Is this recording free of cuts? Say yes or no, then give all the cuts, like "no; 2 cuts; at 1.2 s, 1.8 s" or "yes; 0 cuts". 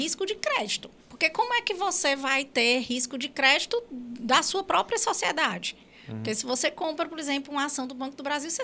no; 1 cut; at 1.0 s